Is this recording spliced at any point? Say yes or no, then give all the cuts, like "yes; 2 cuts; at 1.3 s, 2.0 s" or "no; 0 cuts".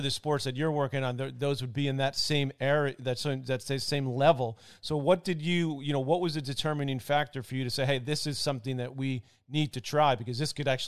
no; 0 cuts